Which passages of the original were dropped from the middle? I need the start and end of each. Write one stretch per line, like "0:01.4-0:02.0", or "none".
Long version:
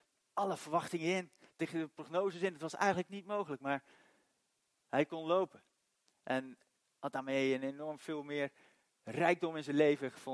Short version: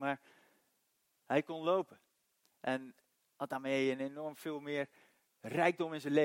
none